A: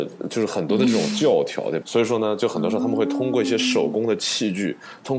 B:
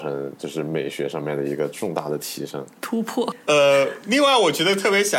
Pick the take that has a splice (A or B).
A